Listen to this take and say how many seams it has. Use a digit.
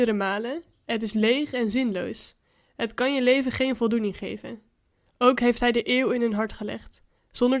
1